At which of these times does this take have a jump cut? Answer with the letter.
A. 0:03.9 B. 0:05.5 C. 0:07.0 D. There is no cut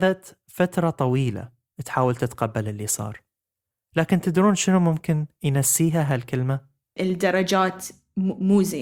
C